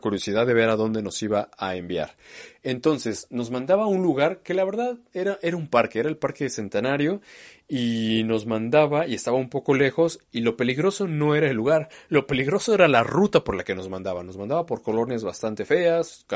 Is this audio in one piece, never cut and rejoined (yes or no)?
yes